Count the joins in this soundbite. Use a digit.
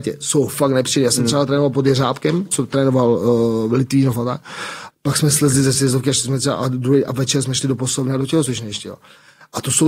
1